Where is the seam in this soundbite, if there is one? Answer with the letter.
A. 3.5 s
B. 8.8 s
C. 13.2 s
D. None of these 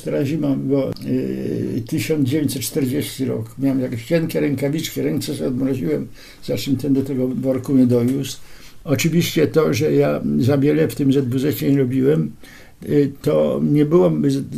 B